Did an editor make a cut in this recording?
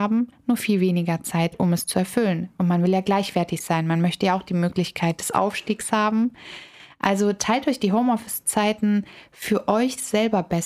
no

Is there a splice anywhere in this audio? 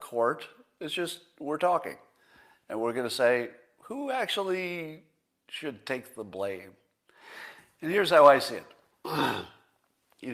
no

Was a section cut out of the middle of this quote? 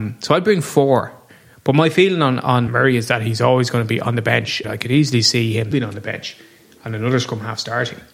yes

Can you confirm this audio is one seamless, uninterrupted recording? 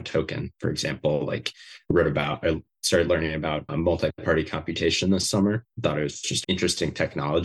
no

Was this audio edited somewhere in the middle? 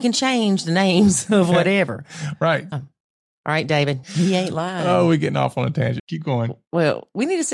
yes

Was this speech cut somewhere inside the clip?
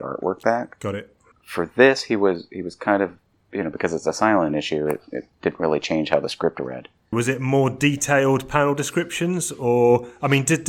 yes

